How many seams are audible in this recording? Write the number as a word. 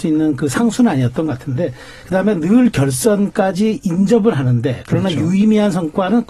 one